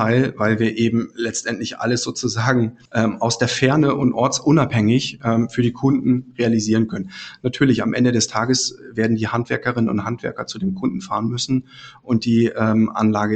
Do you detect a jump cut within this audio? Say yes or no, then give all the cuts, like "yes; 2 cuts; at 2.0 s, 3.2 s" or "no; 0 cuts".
yes; 1 cut; at 2.9 s